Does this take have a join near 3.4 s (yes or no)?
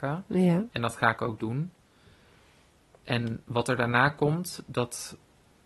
yes